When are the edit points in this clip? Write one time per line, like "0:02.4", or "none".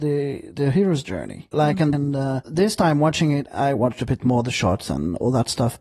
0:01.9
0:03.5